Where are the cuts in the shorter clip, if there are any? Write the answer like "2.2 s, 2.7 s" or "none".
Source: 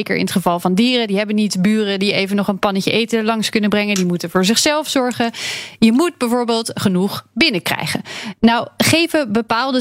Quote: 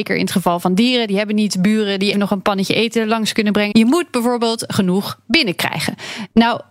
2.1 s, 3.7 s